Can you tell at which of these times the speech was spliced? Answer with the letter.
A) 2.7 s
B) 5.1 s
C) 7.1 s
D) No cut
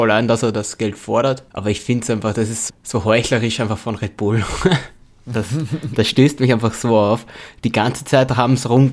A